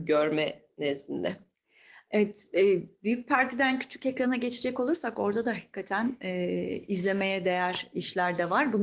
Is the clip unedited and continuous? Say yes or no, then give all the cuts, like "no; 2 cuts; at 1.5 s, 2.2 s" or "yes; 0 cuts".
yes; 0 cuts